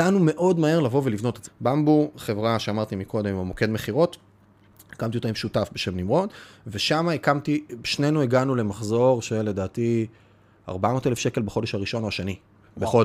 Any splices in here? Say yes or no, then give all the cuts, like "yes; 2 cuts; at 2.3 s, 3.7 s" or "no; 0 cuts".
yes; 1 cut; at 1.4 s